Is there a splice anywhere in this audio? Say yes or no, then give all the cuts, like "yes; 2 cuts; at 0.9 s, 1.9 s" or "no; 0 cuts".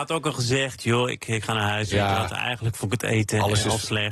no; 0 cuts